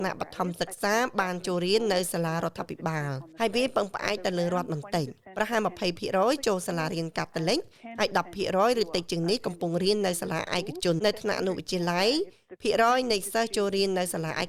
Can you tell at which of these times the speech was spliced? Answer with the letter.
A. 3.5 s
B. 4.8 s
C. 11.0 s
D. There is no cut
C